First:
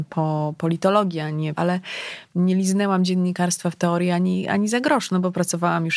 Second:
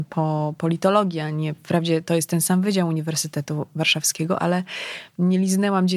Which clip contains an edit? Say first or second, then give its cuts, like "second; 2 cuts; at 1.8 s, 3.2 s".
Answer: first; 1 cut; at 1.6 s